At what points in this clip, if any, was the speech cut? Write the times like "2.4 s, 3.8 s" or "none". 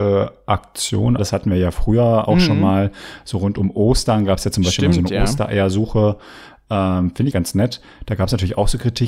1.2 s, 7.3 s